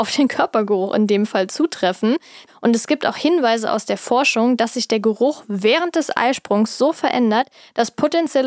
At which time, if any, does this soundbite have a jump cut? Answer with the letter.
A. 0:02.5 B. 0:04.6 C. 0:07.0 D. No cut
A